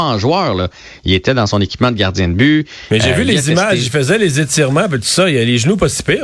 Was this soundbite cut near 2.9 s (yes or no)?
no